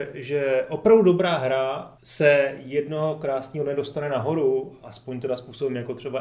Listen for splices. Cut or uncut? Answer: cut